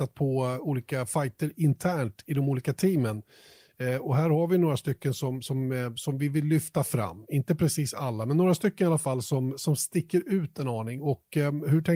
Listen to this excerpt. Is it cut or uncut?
uncut